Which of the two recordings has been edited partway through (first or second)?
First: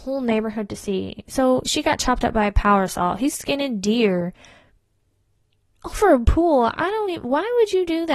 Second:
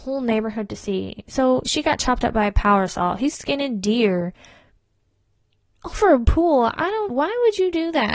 second